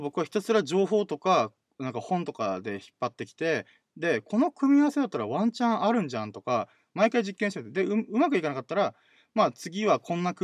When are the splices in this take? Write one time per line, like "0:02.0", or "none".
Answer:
none